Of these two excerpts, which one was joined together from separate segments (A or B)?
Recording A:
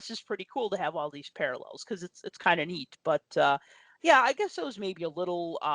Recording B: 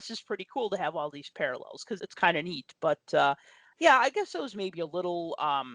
B